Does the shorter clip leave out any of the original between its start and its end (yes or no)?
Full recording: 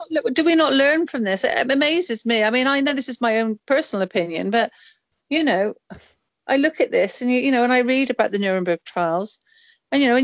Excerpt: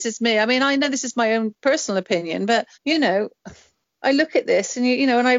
yes